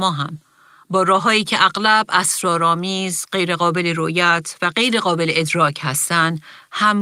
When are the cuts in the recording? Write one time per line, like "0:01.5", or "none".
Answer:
none